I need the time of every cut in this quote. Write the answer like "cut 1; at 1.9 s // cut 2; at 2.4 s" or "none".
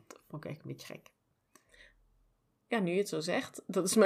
none